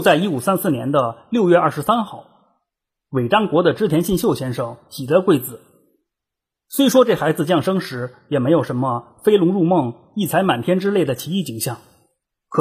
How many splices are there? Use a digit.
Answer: 0